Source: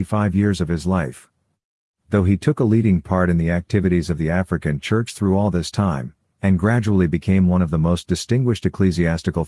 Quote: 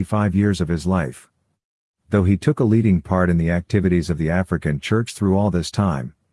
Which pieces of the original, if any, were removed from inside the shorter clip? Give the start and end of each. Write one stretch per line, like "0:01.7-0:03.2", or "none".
none